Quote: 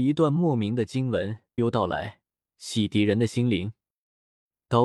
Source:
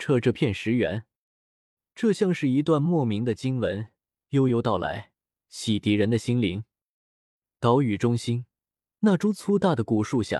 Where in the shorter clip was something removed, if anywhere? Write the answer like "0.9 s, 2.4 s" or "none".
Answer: 1.6 s